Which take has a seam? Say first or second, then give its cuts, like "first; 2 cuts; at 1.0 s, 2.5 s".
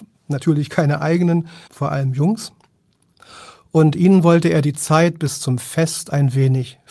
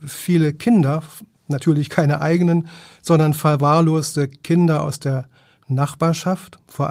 first; 1 cut; at 1.7 s